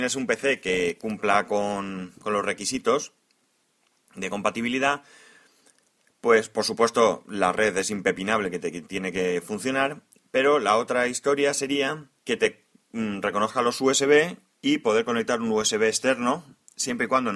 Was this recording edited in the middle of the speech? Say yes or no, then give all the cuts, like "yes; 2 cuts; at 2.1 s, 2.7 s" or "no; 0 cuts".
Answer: yes; 1 cut; at 12.2 s